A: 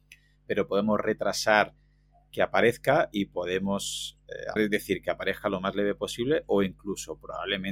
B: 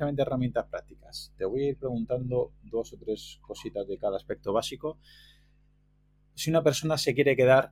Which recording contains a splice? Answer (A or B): A